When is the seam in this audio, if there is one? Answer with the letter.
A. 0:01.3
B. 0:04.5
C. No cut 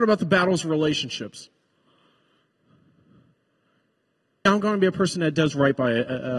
B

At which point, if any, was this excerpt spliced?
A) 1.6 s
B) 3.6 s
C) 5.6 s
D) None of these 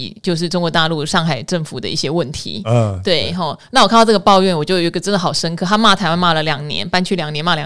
D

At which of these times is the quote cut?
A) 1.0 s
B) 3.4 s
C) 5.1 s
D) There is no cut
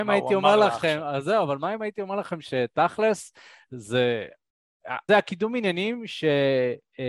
C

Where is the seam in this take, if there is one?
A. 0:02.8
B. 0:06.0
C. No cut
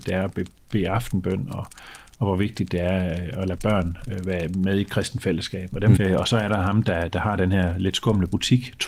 B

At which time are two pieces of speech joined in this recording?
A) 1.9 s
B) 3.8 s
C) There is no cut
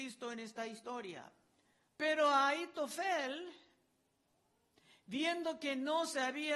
A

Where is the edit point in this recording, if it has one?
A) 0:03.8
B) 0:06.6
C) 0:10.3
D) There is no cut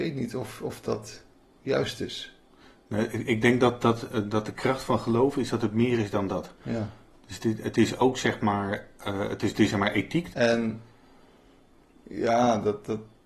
C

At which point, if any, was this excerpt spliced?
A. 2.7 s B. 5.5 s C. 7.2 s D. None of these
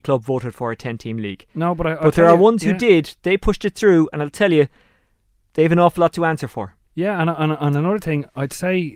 D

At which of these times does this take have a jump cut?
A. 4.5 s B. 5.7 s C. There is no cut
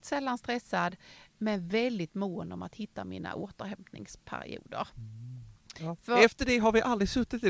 B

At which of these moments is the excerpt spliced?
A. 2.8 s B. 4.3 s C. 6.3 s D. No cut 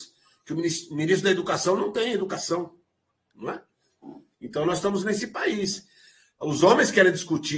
B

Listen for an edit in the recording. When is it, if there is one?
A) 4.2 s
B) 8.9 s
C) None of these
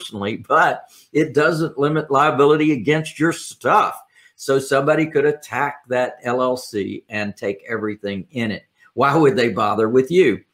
C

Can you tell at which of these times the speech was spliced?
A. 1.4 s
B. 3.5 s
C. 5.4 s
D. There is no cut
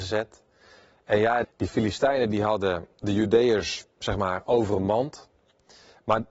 A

